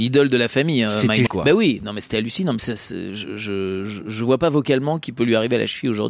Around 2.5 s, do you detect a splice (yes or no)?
no